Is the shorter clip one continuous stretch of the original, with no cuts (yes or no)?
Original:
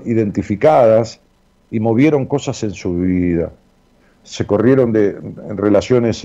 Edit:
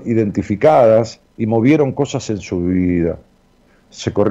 no